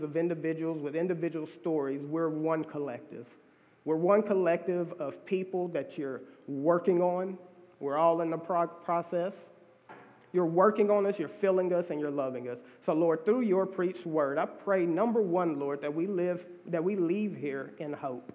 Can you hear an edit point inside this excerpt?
no; 0 cuts

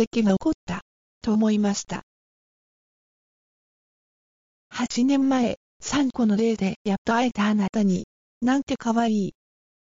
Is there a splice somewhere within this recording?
yes; 1 cut; at 8.3 s

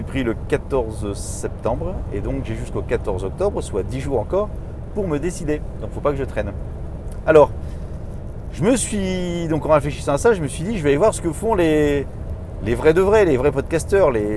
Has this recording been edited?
no; 0 cuts

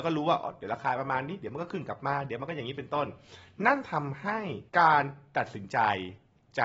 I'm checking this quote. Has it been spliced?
yes; 1 cut; at 4.7 s

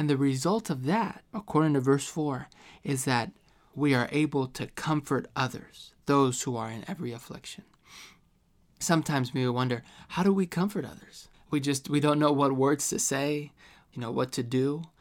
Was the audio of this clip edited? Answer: yes; 1 cut; at 3.7 s

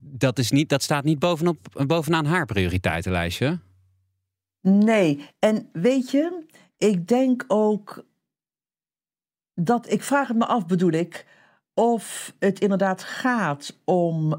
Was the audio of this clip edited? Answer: no; 0 cuts

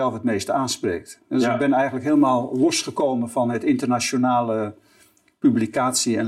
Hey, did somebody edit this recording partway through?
no; 0 cuts

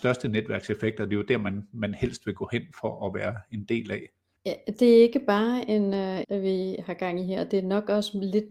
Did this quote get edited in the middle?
yes; 2 cuts; at 4.4 s, 6.2 s

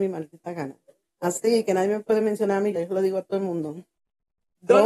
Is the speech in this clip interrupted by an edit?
yes; 1 cut; at 2.7 s

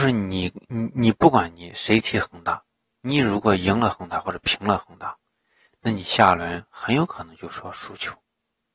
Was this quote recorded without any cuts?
yes; 0 cuts

